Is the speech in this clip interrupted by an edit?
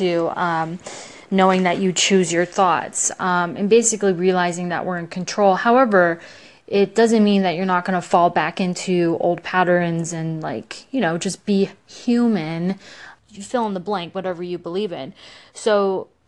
yes; 1 cut; at 13.2 s

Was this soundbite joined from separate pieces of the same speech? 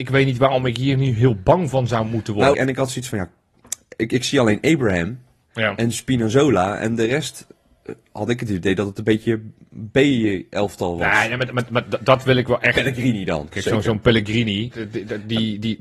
yes; 3 cuts; at 2.5 s, 13.5 s, 14.7 s

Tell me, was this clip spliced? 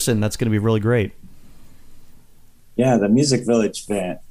no; 0 cuts

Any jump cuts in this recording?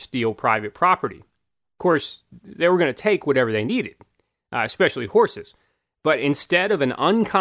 no; 0 cuts

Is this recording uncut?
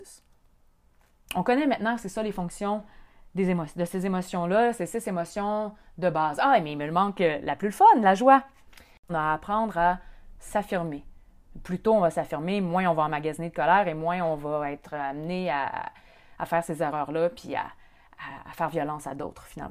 no; 1 cut; at 9.1 s

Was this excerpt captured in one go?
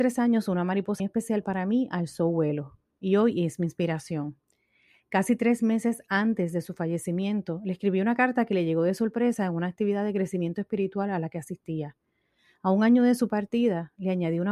no; 1 cut; at 1.0 s

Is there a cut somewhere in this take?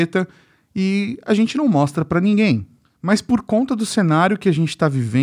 no; 0 cuts

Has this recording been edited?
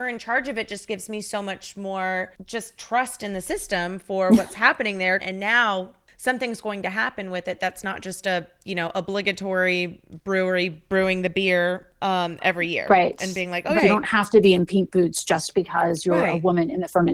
yes; 2 cuts; at 5.2 s, 13.8 s

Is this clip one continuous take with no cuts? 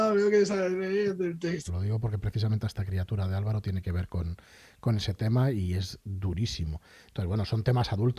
no; 1 cut; at 1.7 s

